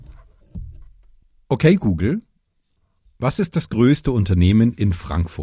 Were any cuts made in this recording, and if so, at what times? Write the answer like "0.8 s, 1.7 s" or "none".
none